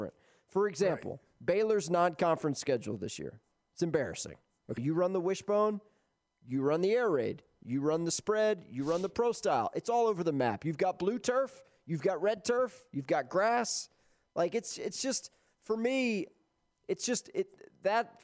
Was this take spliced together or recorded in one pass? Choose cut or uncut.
cut